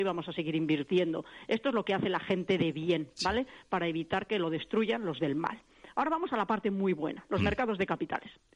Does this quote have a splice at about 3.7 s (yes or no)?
no